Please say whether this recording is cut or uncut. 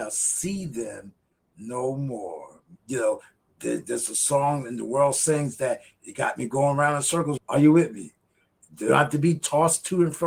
cut